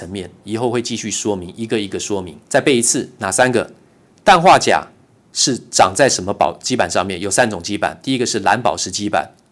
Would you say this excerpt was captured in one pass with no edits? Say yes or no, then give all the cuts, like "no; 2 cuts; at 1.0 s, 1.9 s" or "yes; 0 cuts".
no; 1 cut; at 2.4 s